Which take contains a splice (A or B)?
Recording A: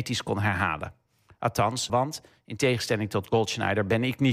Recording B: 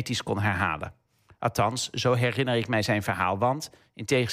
A